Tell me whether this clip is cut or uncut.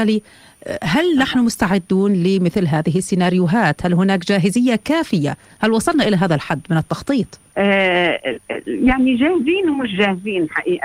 cut